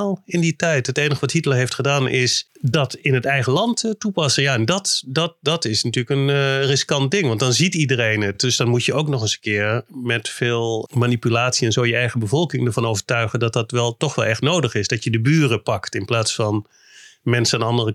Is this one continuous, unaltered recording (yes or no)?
yes